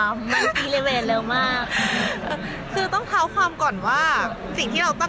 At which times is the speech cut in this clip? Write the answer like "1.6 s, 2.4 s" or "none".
2.3 s